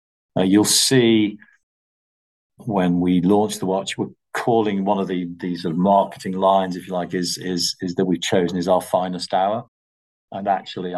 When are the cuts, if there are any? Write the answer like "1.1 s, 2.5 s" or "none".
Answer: 2.6 s

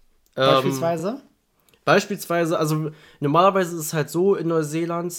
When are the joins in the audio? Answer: none

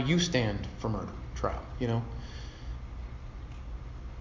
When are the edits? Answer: none

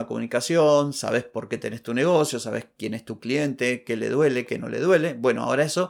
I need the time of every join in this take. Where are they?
none

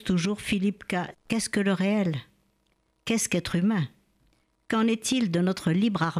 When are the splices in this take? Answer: 1.1 s

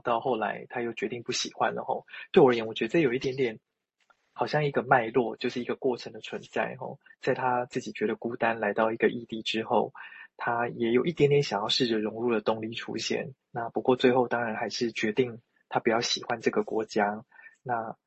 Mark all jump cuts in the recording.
13.4 s

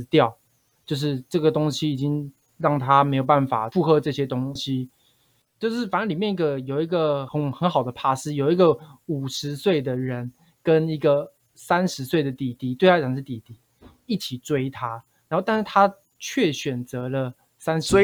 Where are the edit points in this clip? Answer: none

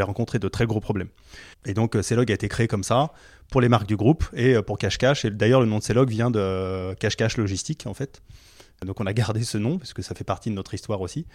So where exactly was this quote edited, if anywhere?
1.5 s

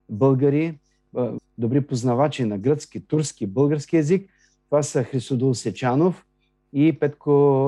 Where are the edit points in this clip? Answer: 1.4 s

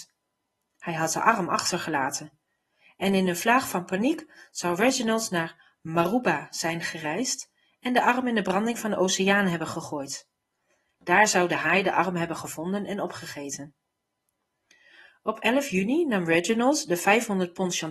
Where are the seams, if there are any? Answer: none

